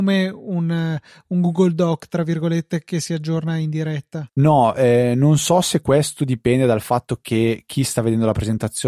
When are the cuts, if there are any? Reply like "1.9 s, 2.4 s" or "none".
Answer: 4.3 s